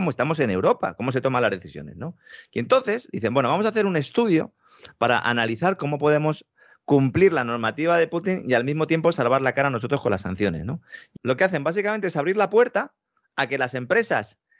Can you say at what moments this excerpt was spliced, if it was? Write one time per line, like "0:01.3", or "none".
0:11.2